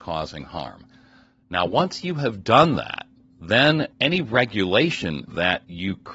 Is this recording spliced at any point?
no; 0 cuts

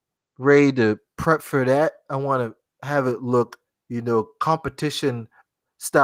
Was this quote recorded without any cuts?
yes; 0 cuts

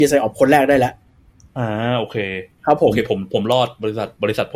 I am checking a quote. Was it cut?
no; 0 cuts

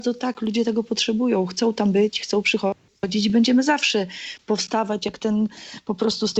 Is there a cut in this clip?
no; 0 cuts

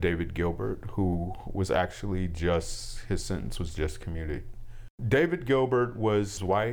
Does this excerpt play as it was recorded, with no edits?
yes; 0 cuts

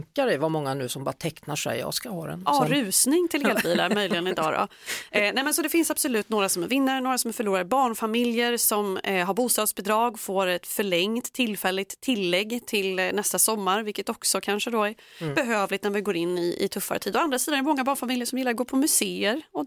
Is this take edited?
no; 0 cuts

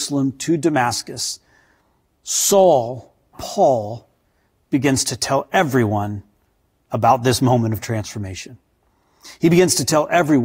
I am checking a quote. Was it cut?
yes; 1 cut; at 3.3 s

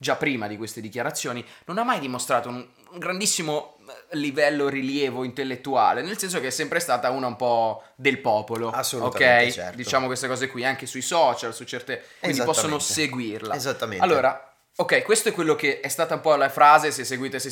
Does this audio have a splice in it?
yes; 1 cut; at 12.2 s

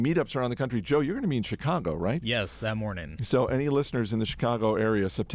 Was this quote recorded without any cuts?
yes; 0 cuts

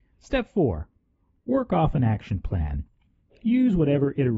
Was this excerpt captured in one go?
yes; 0 cuts

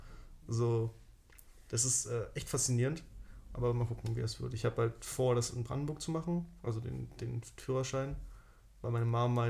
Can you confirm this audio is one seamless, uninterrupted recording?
yes; 0 cuts

